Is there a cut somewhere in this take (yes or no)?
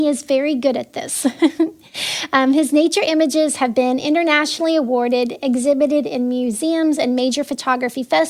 no